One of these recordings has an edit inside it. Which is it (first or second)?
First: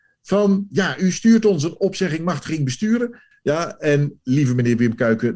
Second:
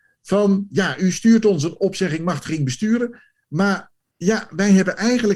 first